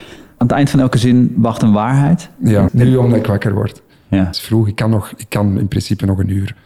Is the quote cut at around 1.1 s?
no; 2 cuts; at 2.7 s, 4.3 s

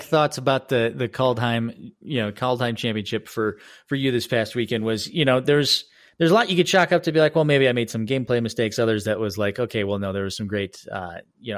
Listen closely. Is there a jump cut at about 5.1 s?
no; 0 cuts

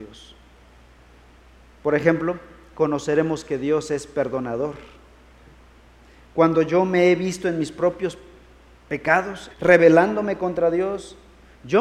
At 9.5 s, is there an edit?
yes; 1 cut; at 9.5 s

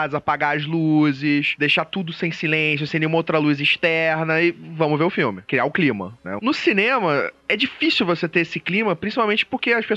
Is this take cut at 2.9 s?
no; 1 cut; at 6.4 s

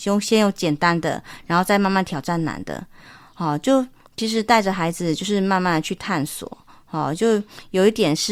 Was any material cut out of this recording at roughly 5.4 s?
no; 0 cuts

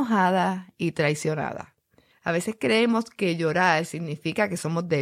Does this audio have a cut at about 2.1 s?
yes; 1 cut; at 2.1 s

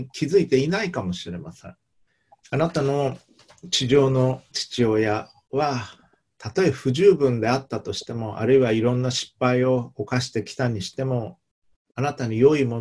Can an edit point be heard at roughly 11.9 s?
no; 1 cut; at 2.4 s

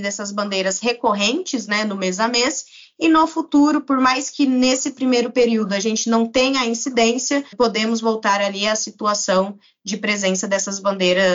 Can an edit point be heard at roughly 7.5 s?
yes; 1 cut; at 7.5 s

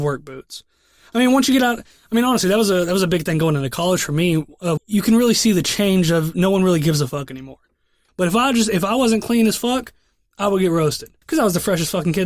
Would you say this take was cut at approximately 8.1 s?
yes; 3 cuts; at 4.8 s, 8.1 s, 11.2 s

